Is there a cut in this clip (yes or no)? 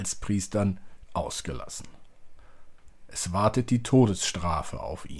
yes